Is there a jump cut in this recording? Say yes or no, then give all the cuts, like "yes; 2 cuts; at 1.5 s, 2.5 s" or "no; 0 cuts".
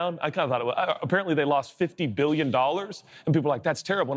no; 0 cuts